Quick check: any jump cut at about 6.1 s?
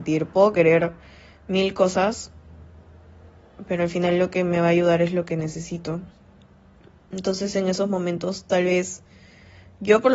no; 0 cuts

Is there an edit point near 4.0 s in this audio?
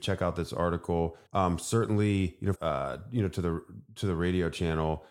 no; 2 cuts; at 1.3 s, 2.6 s

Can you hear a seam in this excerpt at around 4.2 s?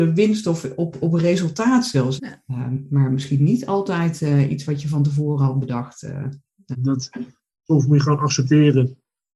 no; 2 cuts; at 2.2 s, 6.7 s

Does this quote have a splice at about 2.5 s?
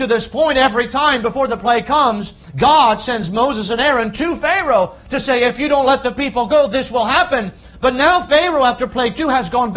no; 0 cuts

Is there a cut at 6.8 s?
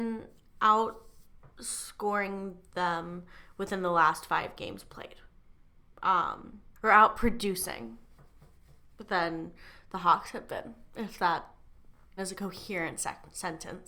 yes; 2 cuts; at 6.8 s, 12.2 s

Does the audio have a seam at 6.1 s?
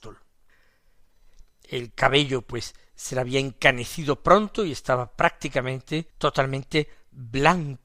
yes; 2 cuts; at 1.6 s, 6.1 s

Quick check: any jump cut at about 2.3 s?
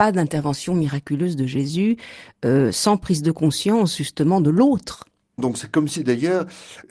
no; 1 cut; at 5.4 s

